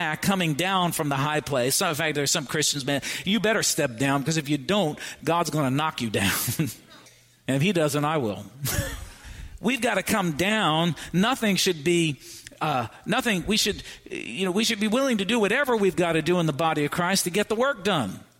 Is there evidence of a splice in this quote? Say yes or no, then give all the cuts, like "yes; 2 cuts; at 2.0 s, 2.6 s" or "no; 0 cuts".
no; 0 cuts